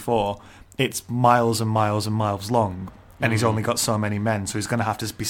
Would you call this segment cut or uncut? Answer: uncut